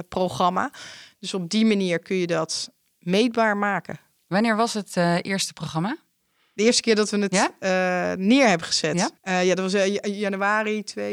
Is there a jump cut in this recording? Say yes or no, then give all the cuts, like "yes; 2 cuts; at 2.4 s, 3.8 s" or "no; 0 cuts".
yes; 1 cut; at 9.2 s